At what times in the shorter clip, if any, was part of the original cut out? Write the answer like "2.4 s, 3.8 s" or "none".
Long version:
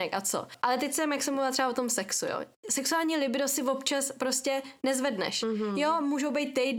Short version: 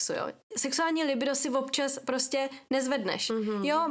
none